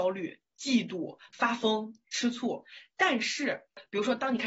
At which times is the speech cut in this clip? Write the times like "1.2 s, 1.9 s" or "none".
none